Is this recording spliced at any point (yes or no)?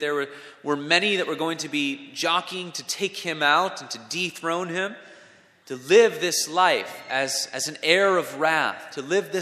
yes